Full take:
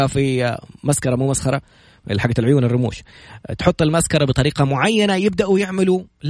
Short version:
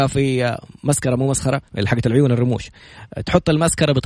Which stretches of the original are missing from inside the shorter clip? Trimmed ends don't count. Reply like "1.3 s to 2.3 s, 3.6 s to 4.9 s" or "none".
1.7 s to 2.0 s